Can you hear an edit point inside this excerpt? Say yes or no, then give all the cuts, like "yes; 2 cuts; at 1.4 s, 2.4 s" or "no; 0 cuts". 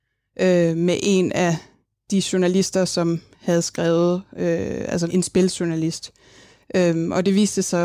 yes; 1 cut; at 5.1 s